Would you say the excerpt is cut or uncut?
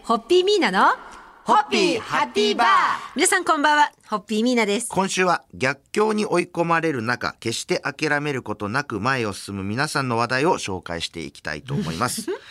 cut